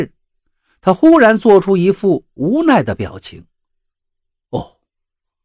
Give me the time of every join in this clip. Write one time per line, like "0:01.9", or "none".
none